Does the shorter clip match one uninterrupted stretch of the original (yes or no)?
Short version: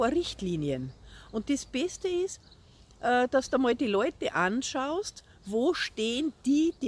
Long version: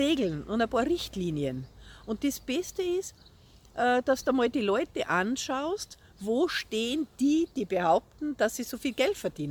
yes